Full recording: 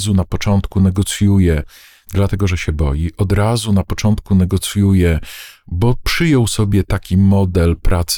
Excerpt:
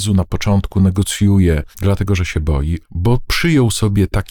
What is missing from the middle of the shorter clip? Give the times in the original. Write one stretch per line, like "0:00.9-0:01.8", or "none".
0:01.7-0:02.0
0:03.1-0:05.6